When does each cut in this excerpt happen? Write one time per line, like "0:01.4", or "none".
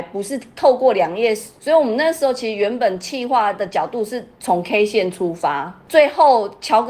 0:01.6